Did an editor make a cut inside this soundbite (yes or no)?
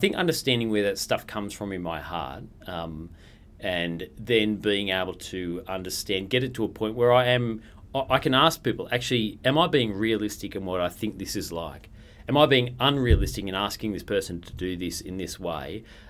no